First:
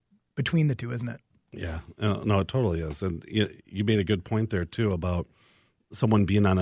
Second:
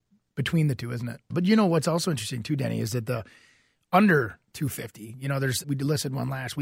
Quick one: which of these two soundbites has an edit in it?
second; 2 cuts; at 1.3 s, 5.6 s

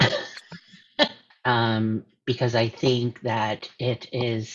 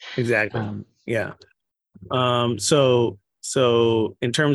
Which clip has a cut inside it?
first; 1 cut; at 1.3 s

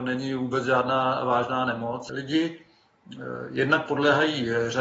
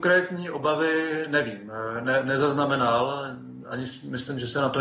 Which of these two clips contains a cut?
first; 1 cut; at 2.1 s

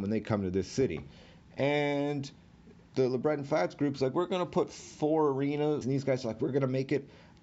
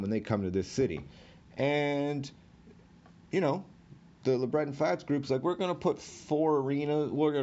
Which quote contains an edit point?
first; 2 cuts; at 2.9 s, 5.8 s

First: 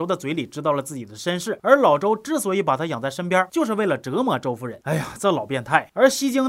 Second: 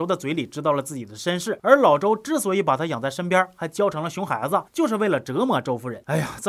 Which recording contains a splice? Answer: first; 1 cut; at 3.5 s

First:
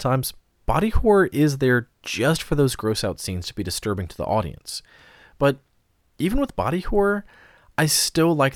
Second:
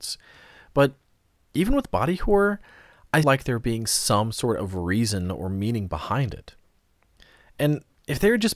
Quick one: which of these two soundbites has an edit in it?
second; 1 cut; at 3.2 s

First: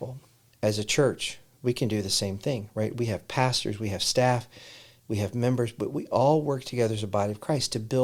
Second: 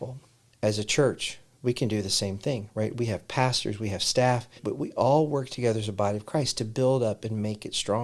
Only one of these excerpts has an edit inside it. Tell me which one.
second; 1 cut; at 4.6 s

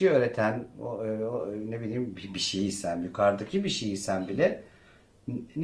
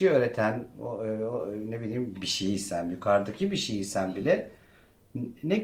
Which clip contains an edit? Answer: second; 1 cut; at 2.1 s

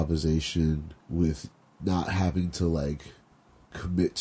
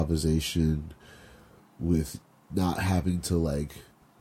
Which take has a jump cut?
first; 1 cut; at 1.0 s

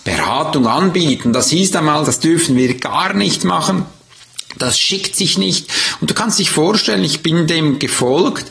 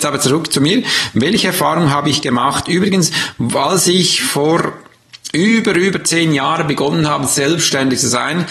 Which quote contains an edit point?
first; 1 cut; at 2.1 s

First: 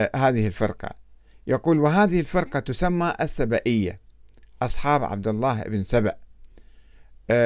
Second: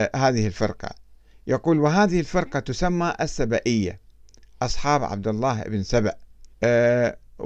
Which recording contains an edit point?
second; 1 cut; at 6.5 s

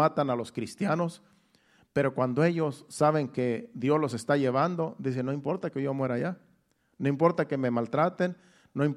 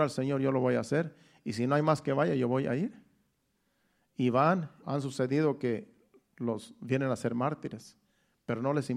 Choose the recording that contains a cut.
second; 1 cut; at 4.8 s

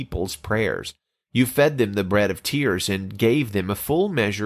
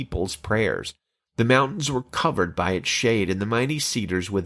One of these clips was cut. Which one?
second; 1 cut; at 1.2 s

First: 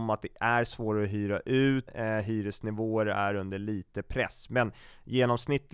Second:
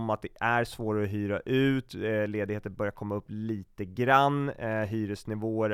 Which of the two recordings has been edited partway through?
first; 1 cut; at 1.9 s

